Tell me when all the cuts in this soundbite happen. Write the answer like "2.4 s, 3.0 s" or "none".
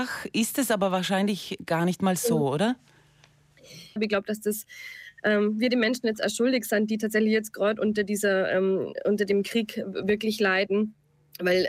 4.0 s

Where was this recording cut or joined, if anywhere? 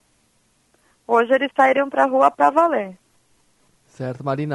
none

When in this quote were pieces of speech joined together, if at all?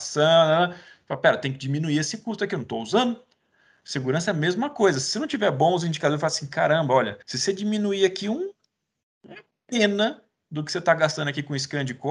7.2 s

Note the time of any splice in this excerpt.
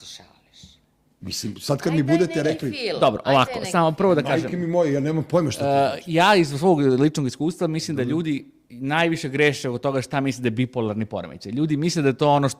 none

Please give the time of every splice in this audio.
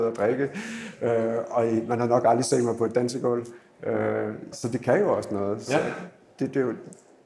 4.5 s

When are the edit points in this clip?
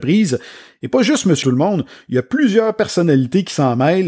1.4 s

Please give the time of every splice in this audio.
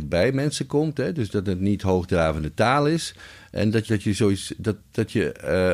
3.9 s

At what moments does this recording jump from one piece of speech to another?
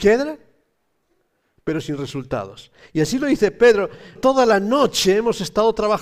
4.2 s

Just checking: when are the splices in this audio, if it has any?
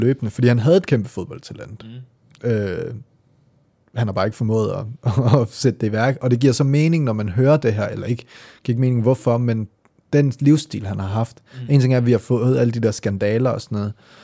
none

